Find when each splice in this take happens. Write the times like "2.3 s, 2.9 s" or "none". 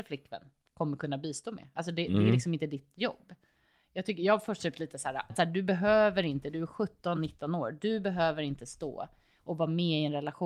5.3 s, 7.1 s